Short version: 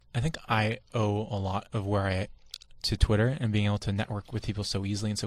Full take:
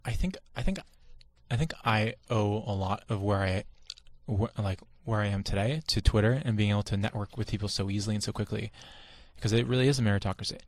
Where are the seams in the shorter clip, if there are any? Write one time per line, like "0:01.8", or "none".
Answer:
0:02.8